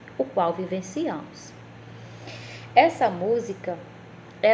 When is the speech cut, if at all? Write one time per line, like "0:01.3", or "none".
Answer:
none